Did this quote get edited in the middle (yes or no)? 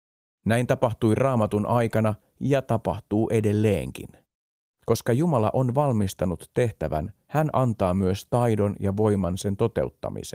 yes